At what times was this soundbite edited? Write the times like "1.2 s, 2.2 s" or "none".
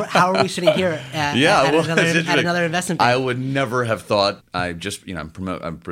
4.4 s